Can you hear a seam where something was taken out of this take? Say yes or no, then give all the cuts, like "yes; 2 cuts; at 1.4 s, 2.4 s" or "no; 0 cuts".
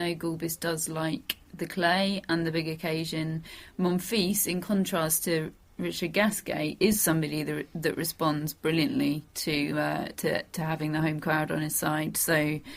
no; 0 cuts